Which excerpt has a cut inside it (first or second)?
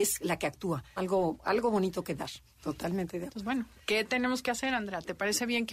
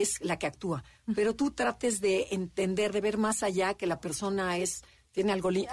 first